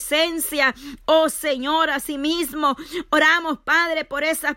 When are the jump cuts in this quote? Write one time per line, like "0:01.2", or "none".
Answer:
none